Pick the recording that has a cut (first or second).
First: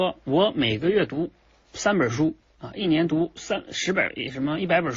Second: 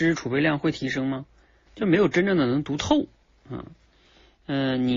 second